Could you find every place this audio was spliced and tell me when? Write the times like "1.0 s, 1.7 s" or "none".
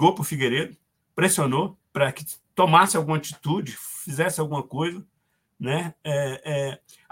1.9 s